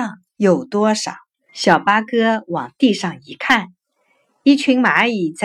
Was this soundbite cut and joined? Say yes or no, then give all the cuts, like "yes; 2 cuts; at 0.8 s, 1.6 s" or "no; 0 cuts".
yes; 1 cut; at 1.5 s